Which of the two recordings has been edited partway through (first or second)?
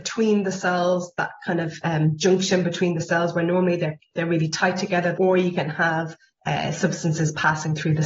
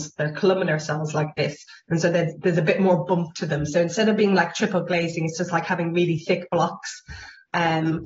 first